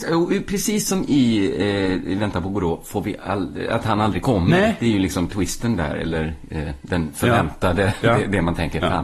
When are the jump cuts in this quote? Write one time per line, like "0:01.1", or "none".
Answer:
none